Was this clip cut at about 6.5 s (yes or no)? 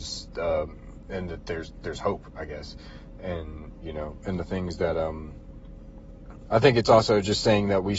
yes